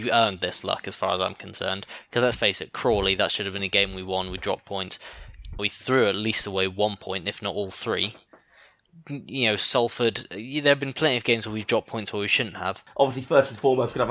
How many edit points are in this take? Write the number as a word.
two